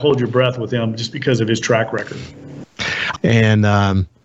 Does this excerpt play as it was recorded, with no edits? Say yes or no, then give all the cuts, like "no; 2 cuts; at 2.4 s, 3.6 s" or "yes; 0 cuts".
no; 1 cut; at 3.1 s